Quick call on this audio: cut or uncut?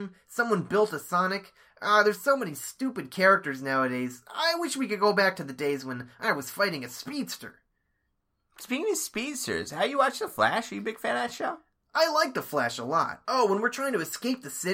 cut